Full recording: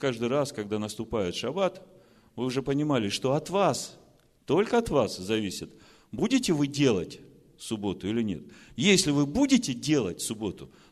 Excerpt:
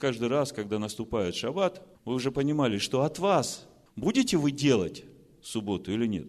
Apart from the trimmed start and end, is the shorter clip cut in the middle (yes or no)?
yes